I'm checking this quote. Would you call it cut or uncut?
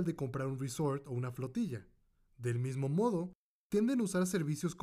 uncut